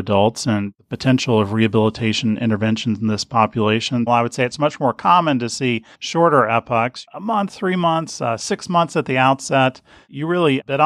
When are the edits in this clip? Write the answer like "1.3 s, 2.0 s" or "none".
4.1 s, 5.9 s